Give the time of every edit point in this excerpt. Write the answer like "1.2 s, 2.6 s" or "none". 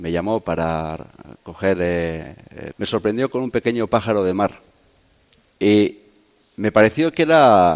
2.7 s

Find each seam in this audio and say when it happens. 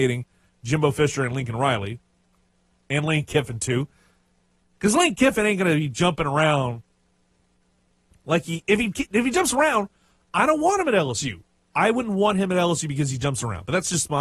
none

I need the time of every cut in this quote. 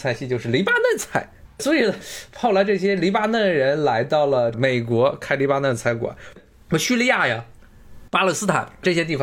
1.5 s, 6.4 s

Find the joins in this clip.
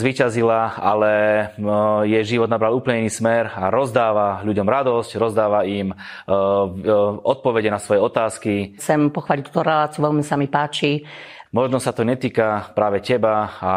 8.8 s, 11.5 s

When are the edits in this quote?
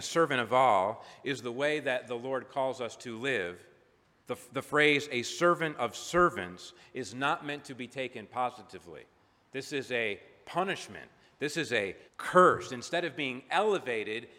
4.2 s, 12.1 s

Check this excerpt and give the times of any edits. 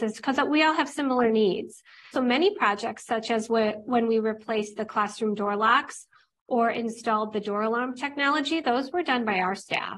2.1 s

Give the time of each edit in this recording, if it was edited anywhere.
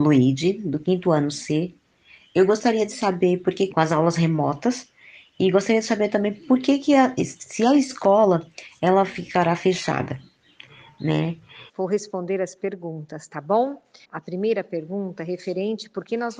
3.7 s, 11.7 s, 14.0 s

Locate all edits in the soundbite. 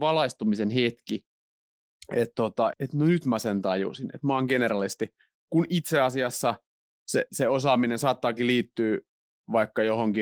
2.7 s

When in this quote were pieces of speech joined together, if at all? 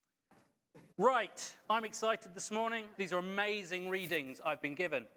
0.9 s, 2.9 s

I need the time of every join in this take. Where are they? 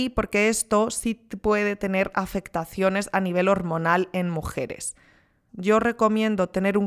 5.5 s

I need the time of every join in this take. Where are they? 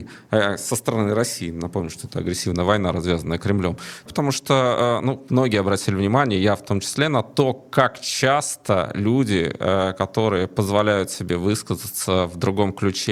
4.1 s

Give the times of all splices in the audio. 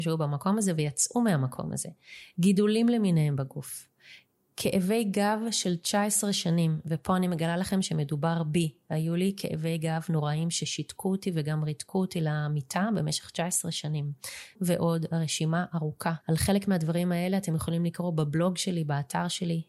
14.5 s, 16.2 s

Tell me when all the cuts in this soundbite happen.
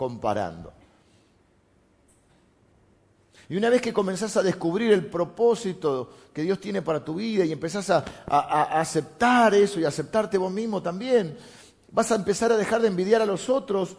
none

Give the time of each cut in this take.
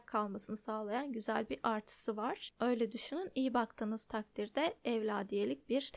2.5 s

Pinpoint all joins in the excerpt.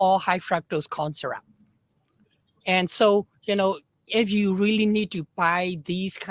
4.1 s

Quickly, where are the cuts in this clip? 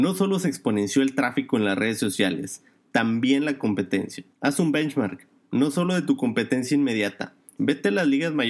4.3 s, 7.6 s

